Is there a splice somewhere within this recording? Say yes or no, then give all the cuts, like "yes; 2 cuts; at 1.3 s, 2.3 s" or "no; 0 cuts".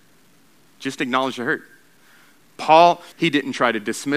yes; 1 cut; at 3.1 s